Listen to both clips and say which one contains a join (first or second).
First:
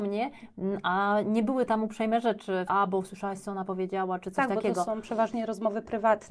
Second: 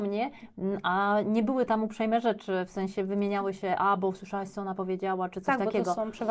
first